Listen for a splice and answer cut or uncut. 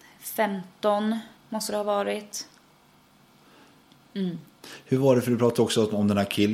cut